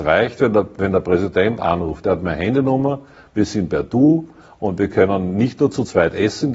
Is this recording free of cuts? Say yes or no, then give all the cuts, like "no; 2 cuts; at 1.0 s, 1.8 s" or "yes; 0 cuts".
yes; 0 cuts